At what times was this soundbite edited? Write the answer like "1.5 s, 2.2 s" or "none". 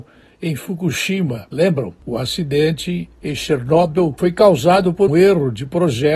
2.0 s, 3.2 s, 5.1 s